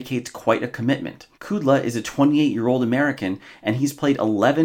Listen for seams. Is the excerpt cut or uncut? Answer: cut